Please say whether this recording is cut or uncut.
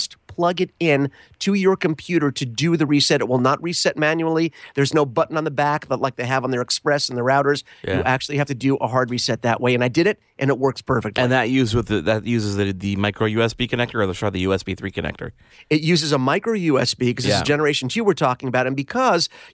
uncut